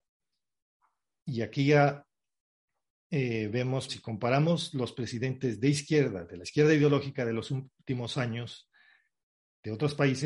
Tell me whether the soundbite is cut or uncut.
cut